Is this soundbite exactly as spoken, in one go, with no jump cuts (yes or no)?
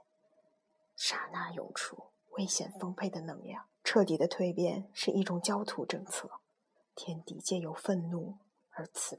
no